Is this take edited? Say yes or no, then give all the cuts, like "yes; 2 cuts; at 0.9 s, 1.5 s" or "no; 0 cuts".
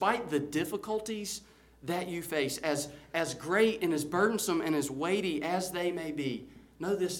no; 0 cuts